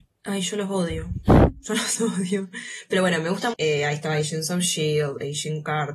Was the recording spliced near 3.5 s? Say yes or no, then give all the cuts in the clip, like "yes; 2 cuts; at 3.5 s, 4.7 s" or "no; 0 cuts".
yes; 1 cut; at 3.5 s